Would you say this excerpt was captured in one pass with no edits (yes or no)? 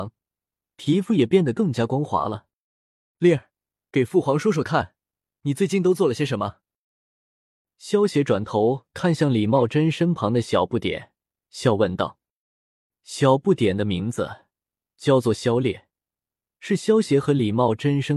yes